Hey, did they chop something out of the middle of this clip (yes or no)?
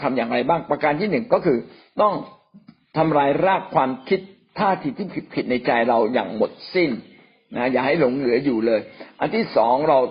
no